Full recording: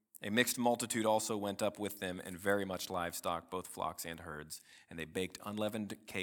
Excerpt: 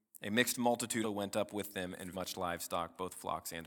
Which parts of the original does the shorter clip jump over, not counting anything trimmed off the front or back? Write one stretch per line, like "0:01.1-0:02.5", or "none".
0:01.0-0:01.3
0:02.4-0:02.7